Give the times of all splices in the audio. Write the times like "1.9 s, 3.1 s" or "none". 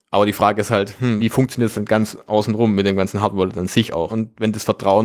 1.2 s, 4.1 s